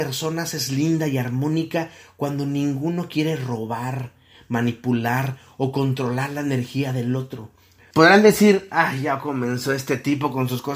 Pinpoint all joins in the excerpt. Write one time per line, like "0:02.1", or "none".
0:07.9